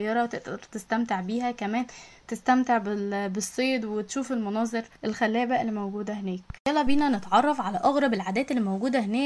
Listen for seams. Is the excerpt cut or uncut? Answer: cut